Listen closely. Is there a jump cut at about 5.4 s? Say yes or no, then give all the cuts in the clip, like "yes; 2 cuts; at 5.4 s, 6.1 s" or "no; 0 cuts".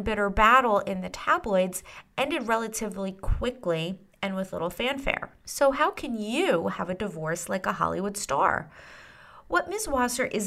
yes; 1 cut; at 5.4 s